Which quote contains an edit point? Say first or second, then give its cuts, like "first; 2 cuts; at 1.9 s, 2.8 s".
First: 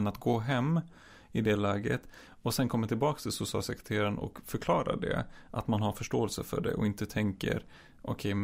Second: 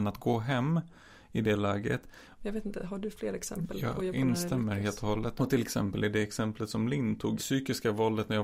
second; 3 cuts; at 2.4 s, 5.4 s, 7.4 s